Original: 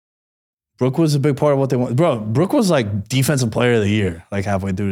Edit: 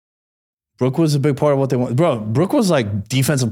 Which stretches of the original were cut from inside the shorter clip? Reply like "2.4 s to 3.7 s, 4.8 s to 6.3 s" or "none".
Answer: none